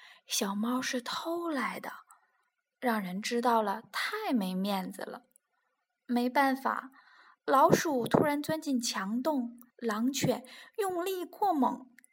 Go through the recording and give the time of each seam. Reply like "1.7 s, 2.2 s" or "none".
7.4 s, 9.7 s